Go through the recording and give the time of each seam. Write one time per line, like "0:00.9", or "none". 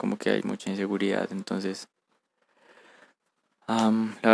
none

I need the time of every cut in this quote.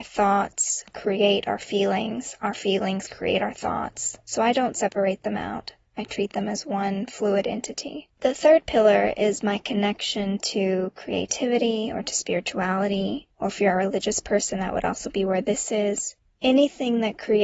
none

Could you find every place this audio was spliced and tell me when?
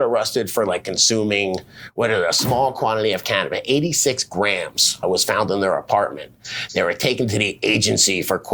0:05.0

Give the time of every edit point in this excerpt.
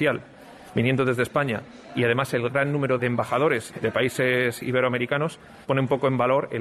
0:03.7

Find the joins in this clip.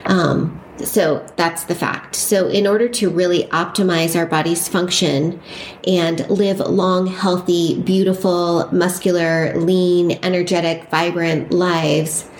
none

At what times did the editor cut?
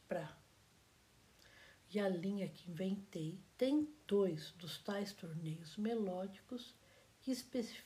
0:01.8
0:03.5

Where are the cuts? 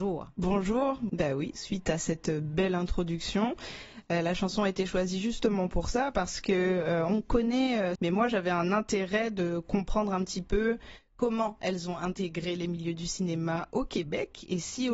0:01.1
0:08.0

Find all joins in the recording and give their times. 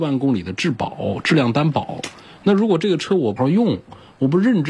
0:03.4

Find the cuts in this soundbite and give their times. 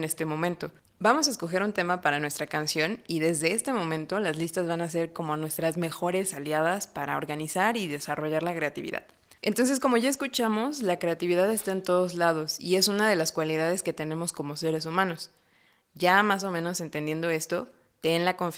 0:09.4

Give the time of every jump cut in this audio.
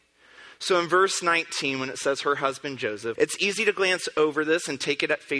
0:03.2

